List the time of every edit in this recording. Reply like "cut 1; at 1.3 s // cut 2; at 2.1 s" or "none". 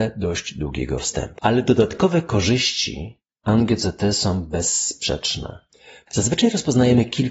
cut 1; at 1.4 s // cut 2; at 6.1 s